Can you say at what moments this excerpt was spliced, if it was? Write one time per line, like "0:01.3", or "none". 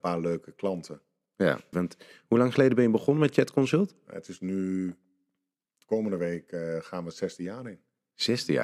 0:01.7